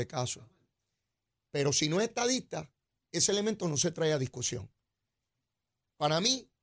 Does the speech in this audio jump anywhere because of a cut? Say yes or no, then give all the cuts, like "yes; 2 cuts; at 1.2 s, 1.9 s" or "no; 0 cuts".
yes; 1 cut; at 1.4 s